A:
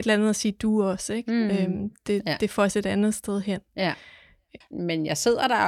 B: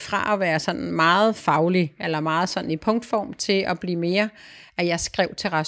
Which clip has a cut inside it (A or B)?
A